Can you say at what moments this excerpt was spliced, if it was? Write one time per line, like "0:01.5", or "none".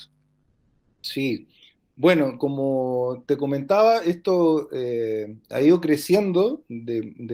none

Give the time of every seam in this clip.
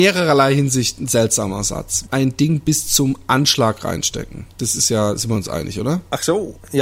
0:02.1
0:04.5

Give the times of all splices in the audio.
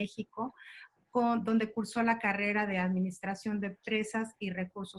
none

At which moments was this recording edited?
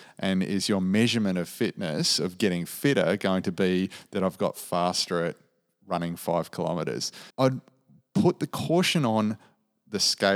0:07.3

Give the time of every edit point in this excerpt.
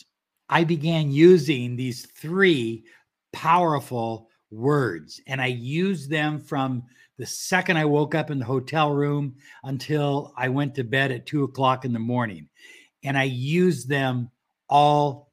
none

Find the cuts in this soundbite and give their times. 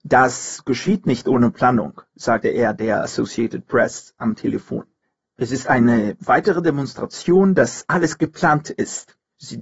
none

